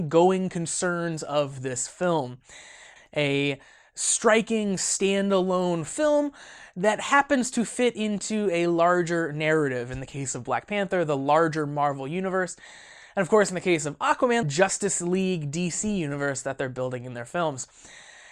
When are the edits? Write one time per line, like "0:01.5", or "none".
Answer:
0:03.0
0:14.4

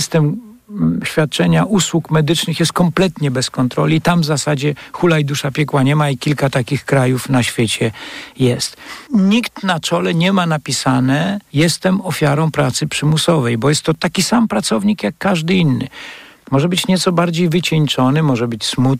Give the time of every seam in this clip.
0:09.1

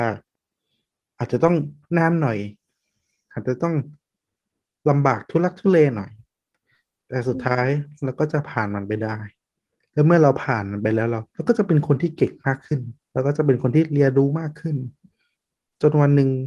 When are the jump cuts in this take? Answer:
0:11.3
0:13.0

